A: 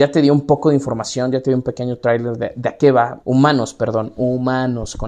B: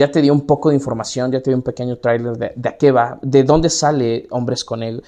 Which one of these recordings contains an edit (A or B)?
A